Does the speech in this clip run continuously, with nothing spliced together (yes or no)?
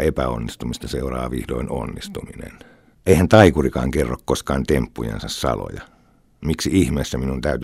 no